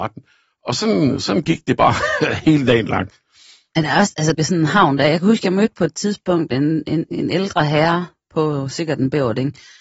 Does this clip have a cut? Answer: yes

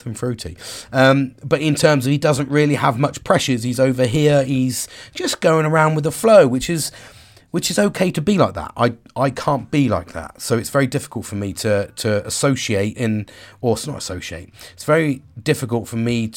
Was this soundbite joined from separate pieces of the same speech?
yes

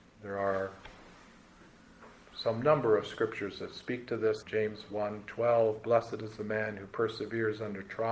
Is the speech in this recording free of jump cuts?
no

